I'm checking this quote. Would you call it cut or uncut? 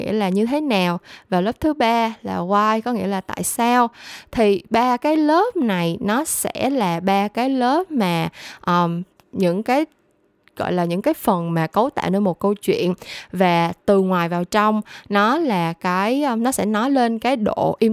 cut